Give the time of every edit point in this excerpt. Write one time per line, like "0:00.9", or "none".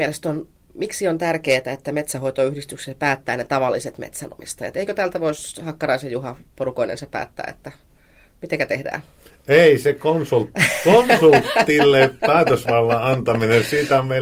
none

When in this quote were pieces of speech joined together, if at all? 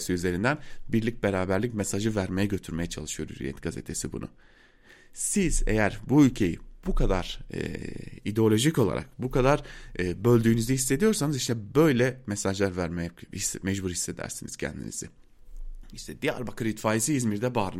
none

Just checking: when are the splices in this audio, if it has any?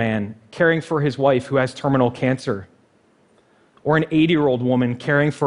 none

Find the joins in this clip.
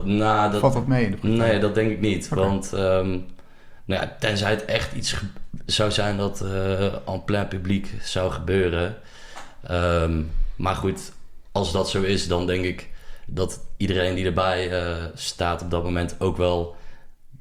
none

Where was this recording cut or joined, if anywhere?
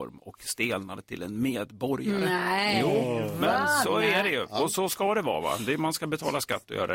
none

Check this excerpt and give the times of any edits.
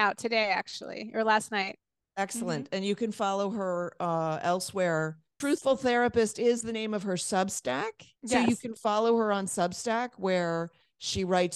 0:05.4
0:08.2

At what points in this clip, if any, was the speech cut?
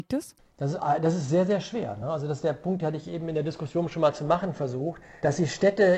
none

